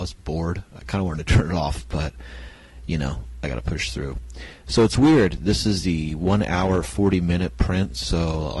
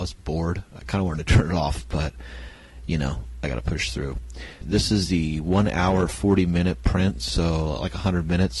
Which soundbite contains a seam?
second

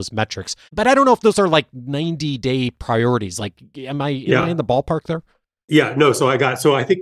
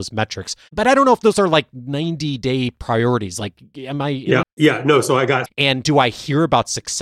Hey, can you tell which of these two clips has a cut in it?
second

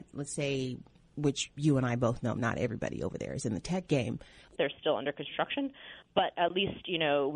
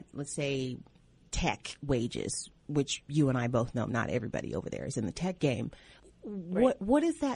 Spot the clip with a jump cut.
first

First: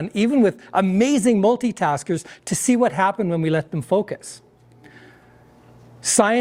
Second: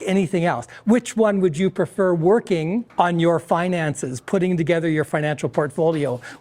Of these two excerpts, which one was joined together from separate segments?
second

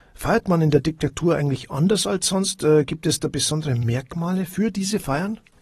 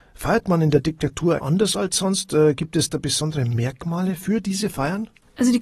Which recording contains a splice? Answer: second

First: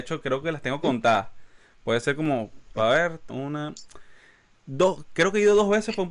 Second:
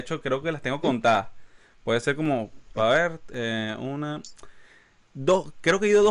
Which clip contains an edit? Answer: first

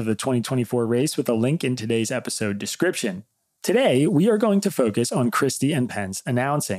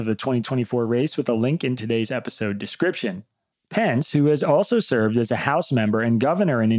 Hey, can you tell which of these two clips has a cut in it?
second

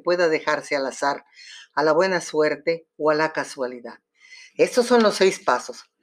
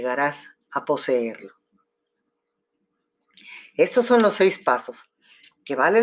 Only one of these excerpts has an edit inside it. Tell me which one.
first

